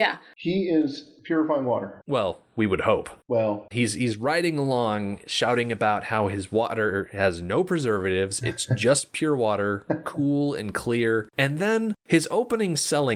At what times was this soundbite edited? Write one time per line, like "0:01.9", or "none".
0:03.7

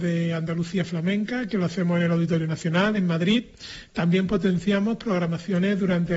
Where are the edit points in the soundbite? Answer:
none

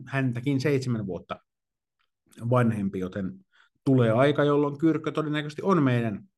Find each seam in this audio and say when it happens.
none

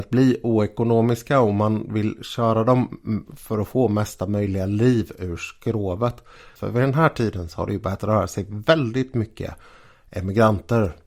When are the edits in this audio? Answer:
0:06.6

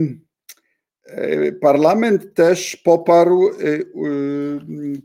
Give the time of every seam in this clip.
none

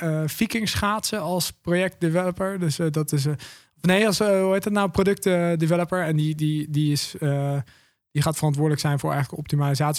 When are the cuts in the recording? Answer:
none

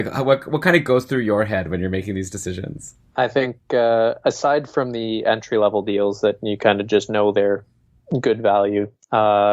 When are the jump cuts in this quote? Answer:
0:03.1

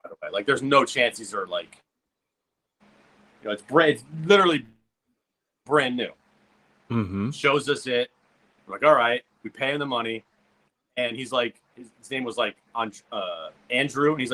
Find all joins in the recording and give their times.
none

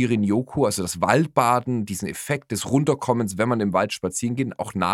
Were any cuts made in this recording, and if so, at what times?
none

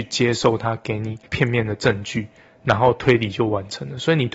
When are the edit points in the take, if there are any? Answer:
0:01.3

